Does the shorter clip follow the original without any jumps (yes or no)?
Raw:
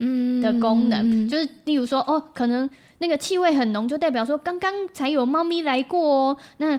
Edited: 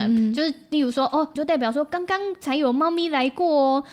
no